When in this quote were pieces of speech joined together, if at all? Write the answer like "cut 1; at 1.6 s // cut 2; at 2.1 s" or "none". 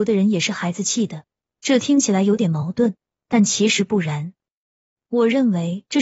cut 1; at 5.0 s